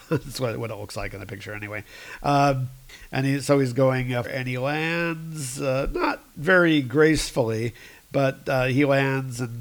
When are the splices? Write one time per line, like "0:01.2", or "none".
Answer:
0:04.2